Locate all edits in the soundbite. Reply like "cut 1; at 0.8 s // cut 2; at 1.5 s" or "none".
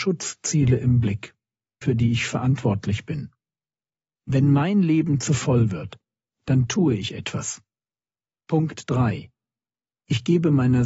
cut 1; at 1.8 s